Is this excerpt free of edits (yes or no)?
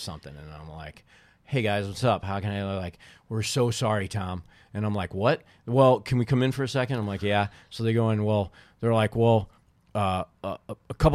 yes